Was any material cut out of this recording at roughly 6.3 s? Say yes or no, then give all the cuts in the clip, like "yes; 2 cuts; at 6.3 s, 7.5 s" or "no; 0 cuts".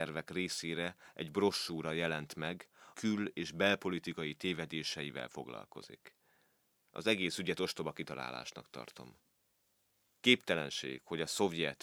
no; 1 cut; at 2.9 s